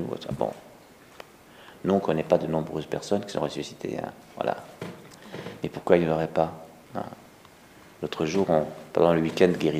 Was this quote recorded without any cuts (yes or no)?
yes